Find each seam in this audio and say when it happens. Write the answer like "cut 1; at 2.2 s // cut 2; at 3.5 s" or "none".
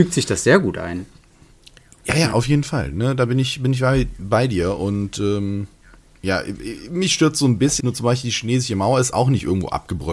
cut 1; at 7.8 s